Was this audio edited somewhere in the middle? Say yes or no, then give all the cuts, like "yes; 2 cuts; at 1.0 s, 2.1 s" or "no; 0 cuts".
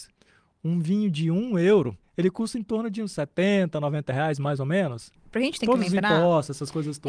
yes; 2 cuts; at 2.0 s, 5.2 s